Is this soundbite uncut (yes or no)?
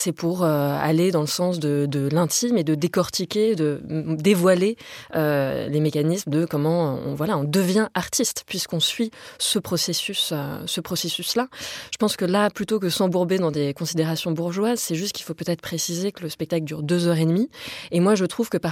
yes